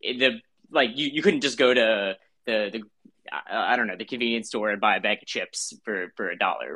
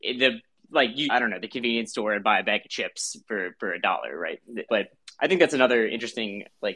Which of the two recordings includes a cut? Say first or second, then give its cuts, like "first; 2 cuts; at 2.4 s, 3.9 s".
second; 2 cuts; at 1.1 s, 4.7 s